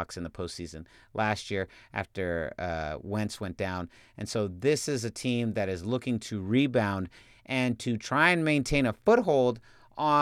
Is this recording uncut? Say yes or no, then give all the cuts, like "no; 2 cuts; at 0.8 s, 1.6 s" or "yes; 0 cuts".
yes; 0 cuts